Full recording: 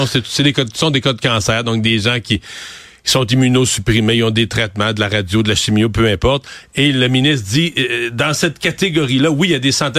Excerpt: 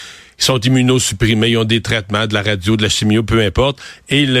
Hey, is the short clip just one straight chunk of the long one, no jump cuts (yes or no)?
yes